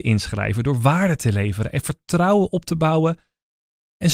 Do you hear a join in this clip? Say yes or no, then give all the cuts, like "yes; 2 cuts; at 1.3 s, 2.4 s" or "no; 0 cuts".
no; 0 cuts